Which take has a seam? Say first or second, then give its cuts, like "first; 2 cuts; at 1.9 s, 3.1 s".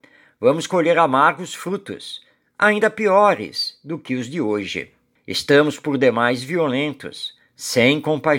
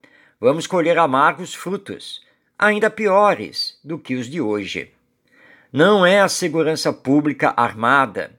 first; 1 cut; at 5.2 s